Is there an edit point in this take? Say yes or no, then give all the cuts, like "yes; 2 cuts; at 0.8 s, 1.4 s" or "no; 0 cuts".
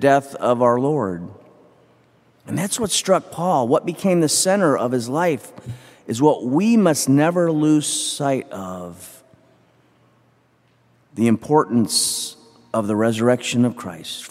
no; 0 cuts